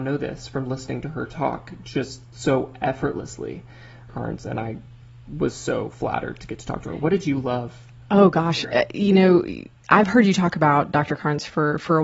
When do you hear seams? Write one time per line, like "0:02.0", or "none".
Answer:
0:04.1